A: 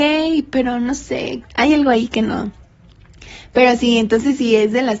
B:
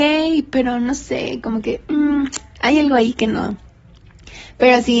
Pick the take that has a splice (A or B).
A